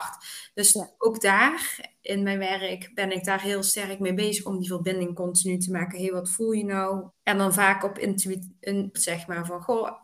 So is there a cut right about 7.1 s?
yes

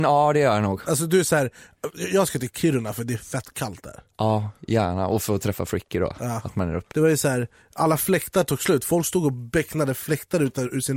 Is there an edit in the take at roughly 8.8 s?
no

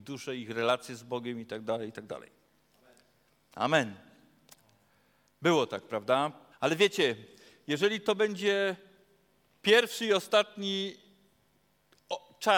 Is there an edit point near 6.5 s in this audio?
yes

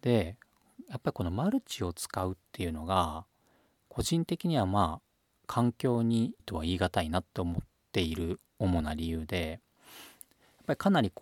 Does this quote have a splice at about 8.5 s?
yes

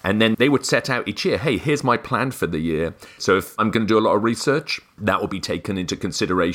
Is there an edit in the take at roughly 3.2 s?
yes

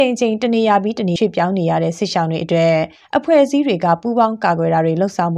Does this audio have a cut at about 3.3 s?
no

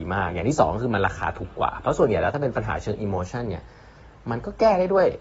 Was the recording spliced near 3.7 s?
no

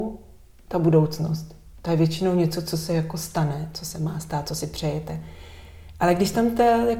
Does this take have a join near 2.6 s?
no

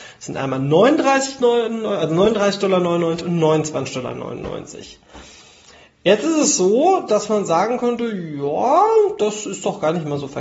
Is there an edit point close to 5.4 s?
no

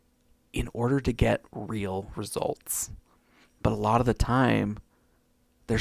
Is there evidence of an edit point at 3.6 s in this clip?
yes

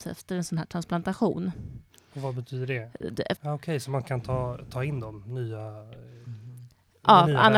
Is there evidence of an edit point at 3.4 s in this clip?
yes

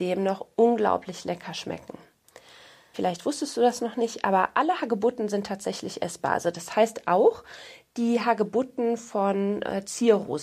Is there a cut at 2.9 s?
yes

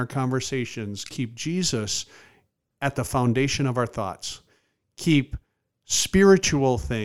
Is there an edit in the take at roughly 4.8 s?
no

